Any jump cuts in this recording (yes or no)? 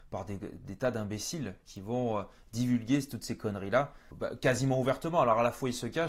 yes